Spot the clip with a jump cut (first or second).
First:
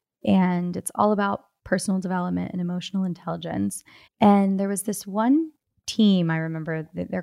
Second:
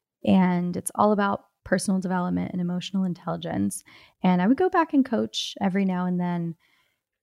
first